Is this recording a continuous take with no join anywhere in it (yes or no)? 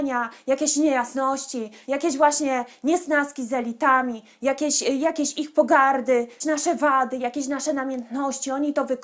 yes